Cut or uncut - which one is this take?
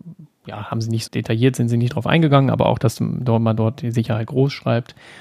cut